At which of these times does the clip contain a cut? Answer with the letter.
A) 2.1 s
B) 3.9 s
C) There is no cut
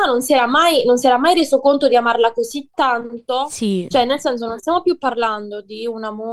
B